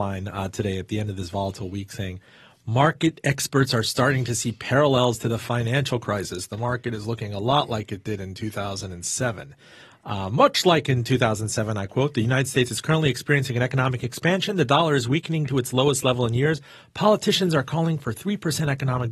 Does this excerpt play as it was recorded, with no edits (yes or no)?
yes